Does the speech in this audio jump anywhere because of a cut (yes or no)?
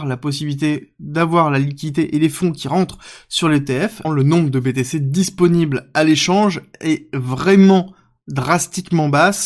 yes